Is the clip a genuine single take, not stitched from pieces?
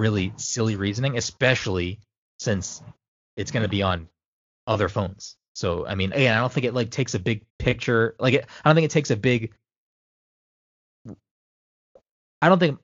no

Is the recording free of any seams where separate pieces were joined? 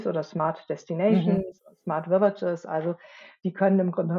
yes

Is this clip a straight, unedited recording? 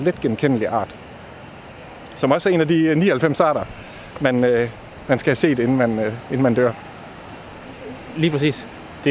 yes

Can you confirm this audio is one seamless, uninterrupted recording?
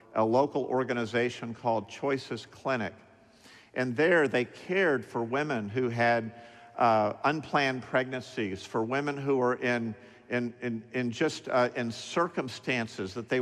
yes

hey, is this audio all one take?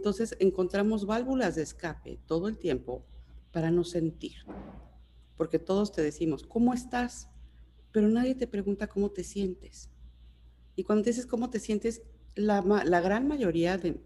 yes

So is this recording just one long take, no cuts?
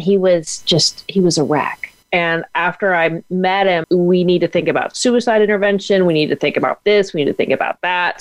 no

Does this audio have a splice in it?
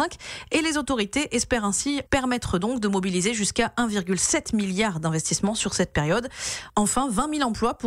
yes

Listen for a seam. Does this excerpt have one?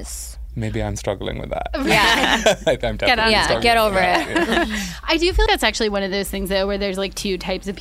yes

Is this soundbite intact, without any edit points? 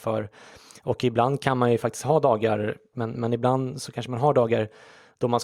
no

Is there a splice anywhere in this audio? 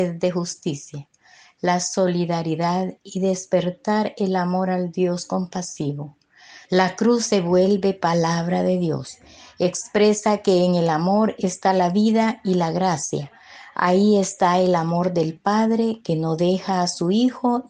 yes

